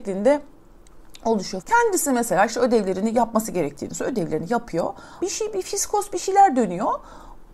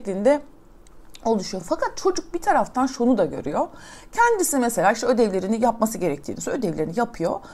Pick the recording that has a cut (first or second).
first